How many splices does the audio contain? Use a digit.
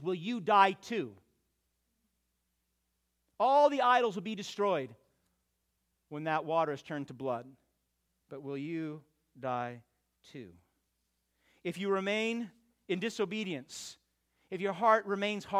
0